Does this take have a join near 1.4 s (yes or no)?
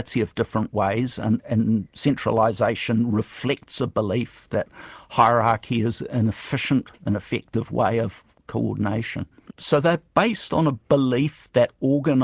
yes